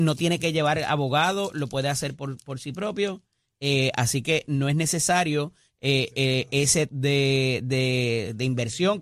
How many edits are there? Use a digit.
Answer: 1